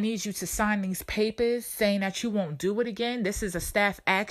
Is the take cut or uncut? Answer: uncut